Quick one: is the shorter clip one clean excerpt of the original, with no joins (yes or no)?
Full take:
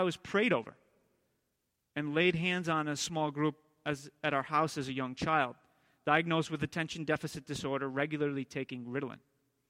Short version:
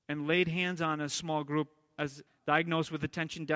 no